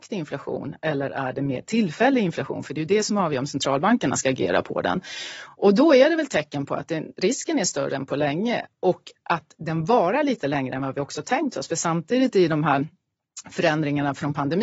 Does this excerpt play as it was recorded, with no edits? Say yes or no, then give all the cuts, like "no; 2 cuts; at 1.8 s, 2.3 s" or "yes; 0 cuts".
yes; 0 cuts